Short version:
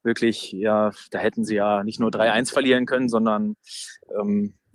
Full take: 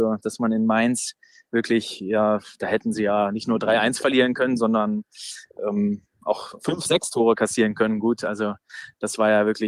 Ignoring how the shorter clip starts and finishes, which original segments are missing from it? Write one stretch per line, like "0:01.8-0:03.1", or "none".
none